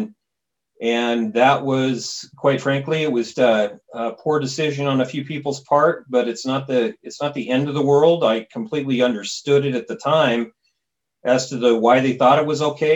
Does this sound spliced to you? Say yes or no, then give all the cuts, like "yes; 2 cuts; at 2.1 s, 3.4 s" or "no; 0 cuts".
yes; 1 cut; at 3.3 s